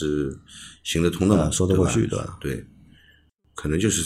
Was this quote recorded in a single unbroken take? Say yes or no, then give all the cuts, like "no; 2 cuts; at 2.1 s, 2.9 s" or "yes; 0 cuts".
yes; 0 cuts